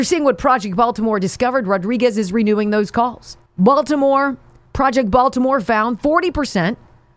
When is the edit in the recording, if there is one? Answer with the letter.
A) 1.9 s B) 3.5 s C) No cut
B